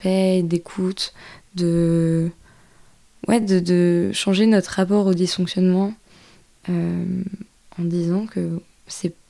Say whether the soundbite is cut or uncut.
uncut